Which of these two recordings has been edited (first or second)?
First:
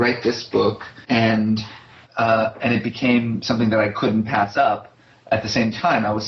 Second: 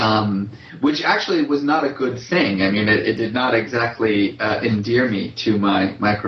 first